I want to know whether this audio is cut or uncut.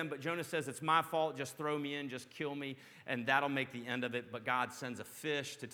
uncut